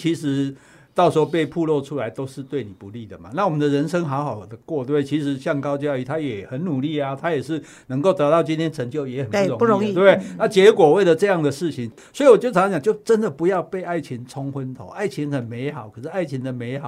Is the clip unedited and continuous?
yes; 0 cuts

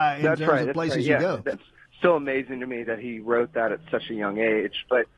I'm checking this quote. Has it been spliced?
yes; 1 cut; at 1.5 s

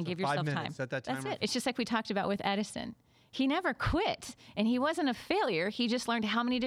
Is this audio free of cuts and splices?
no; 1 cut; at 1.4 s

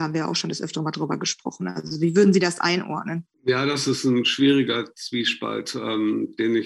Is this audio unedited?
no; 1 cut; at 3.3 s

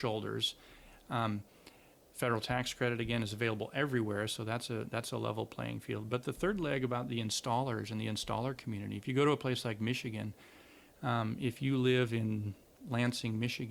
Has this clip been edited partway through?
no; 0 cuts

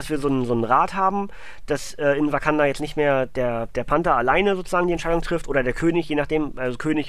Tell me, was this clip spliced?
no; 0 cuts

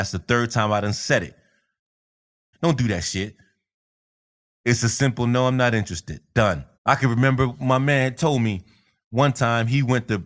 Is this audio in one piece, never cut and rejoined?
no; 2 cuts; at 2.5 s, 6.7 s

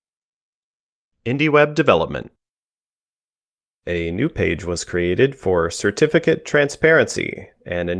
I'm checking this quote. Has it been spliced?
no; 0 cuts

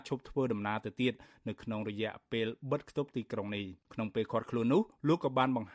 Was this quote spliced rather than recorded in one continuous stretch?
yes; 1 cut; at 3.8 s

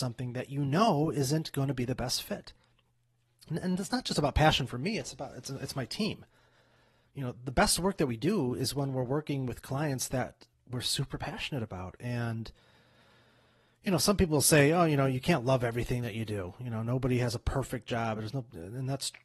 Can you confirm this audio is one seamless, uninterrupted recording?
yes; 0 cuts

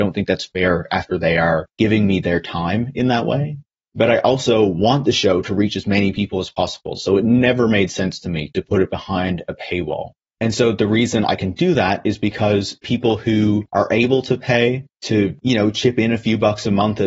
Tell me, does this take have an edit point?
no; 0 cuts

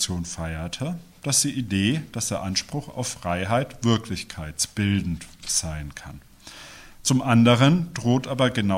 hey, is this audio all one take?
no; 1 cut; at 6.9 s

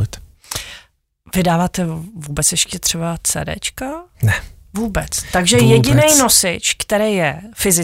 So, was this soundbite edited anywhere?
no; 0 cuts

